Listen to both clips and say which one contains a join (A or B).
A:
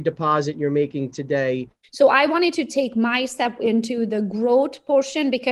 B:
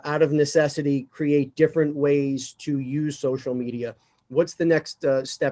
A